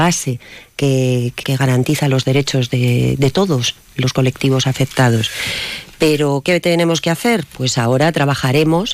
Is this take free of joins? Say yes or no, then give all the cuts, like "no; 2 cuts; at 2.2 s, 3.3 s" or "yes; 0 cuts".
no; 1 cut; at 1.4 s